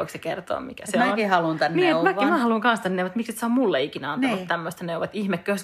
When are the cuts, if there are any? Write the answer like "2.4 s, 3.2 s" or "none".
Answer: none